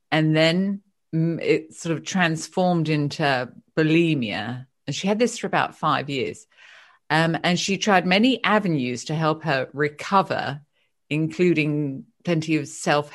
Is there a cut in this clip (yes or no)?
no